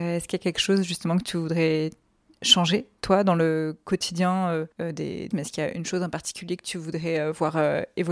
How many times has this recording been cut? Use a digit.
1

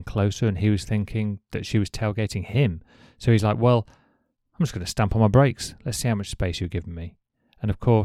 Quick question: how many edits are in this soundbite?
0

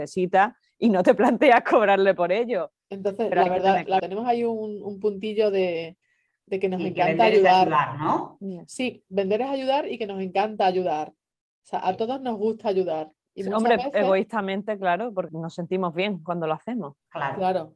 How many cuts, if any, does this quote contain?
2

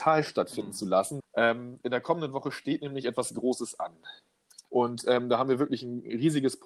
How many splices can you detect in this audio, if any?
2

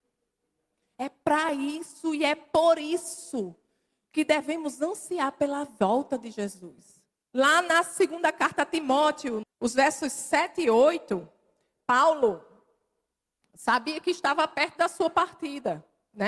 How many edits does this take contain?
2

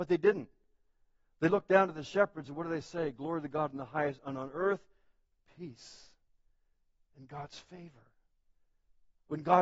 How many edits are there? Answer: 0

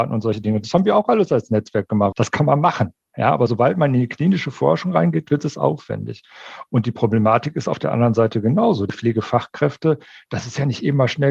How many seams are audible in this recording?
1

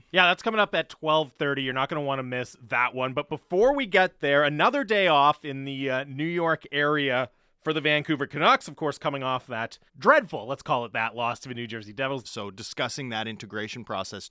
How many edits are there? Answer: 2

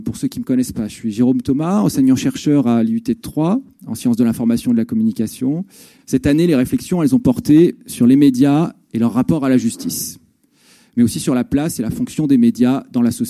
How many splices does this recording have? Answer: 1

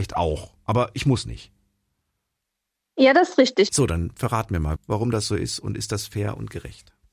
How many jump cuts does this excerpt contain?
2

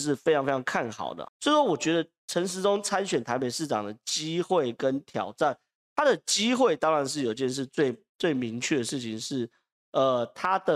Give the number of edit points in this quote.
1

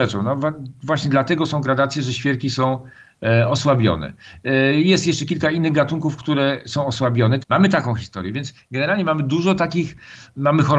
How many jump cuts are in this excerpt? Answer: 1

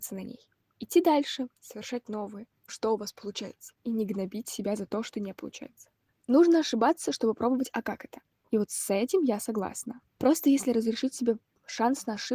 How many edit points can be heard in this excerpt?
2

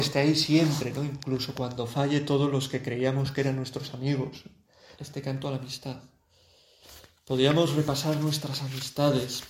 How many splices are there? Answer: 1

